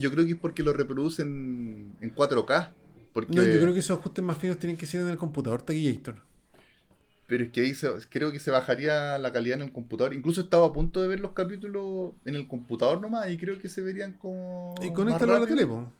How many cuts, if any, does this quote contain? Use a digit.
1